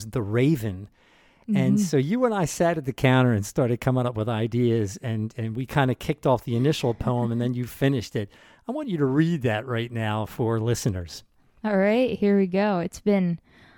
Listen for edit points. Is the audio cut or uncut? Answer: uncut